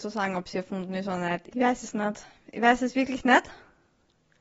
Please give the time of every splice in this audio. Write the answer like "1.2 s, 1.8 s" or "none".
1.5 s